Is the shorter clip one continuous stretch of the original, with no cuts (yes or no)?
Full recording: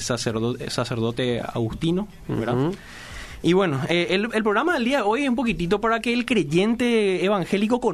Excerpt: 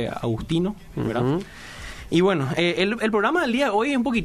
yes